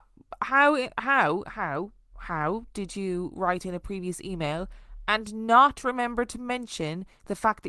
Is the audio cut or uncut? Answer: uncut